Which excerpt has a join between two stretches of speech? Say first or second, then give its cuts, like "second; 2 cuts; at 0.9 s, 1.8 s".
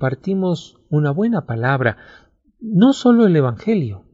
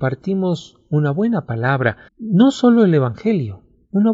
second; 1 cut; at 2.1 s